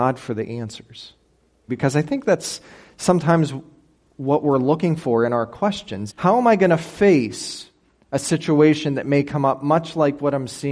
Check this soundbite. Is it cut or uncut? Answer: cut